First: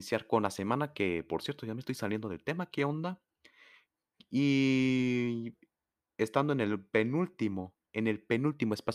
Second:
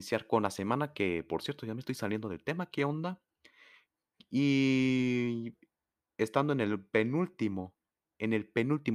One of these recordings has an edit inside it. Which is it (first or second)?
first